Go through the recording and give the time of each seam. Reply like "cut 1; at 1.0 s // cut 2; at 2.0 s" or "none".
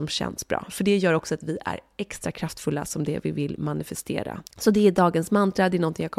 cut 1; at 4.5 s